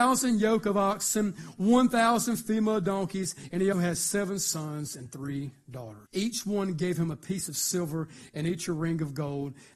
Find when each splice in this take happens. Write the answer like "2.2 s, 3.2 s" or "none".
3.7 s, 6.1 s